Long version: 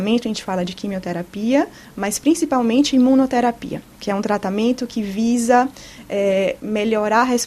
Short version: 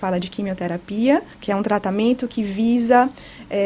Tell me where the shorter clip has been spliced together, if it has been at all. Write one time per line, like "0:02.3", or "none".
0:01.3